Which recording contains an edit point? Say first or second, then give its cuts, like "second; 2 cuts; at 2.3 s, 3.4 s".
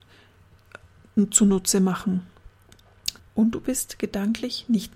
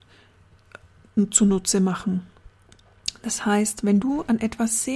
first; 1 cut; at 3.2 s